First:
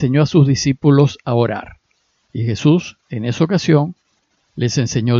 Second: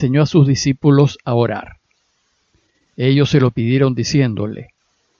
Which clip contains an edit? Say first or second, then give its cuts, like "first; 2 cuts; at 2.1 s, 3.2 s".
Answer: first; 1 cut; at 2.2 s